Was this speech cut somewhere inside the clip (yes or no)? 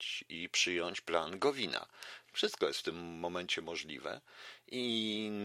yes